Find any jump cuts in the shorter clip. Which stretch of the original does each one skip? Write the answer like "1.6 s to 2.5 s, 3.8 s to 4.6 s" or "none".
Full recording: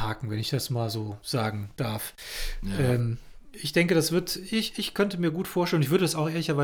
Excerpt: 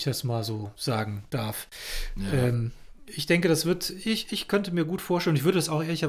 none